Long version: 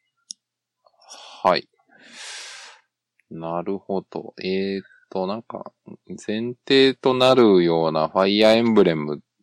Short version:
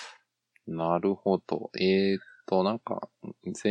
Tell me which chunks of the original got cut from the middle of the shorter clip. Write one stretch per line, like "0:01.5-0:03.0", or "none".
none